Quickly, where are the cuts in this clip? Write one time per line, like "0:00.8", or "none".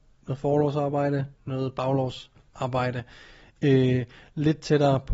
0:01.3
0:03.5